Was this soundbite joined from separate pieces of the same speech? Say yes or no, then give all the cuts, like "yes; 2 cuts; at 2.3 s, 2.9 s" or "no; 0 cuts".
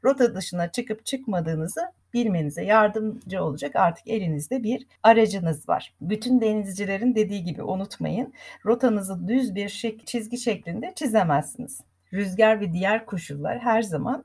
no; 0 cuts